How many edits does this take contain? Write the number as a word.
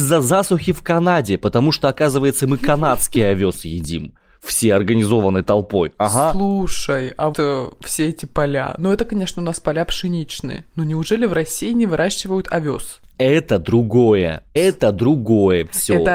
two